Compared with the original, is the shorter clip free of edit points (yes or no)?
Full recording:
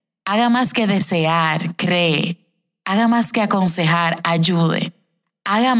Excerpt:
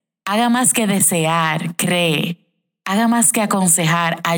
yes